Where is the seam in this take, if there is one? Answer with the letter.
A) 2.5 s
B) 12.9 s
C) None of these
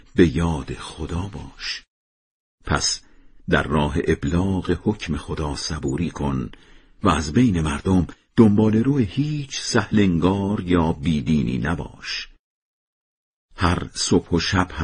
A